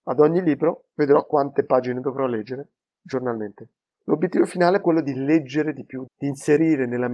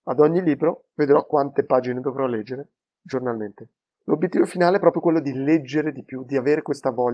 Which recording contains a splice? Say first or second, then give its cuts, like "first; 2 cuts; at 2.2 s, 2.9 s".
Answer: first; 2 cuts; at 4.8 s, 6.1 s